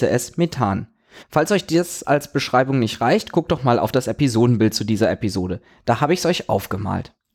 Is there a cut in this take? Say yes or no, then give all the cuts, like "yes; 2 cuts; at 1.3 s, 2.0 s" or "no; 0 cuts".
yes; 1 cut; at 1.2 s